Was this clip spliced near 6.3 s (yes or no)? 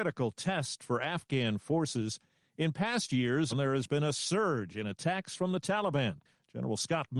no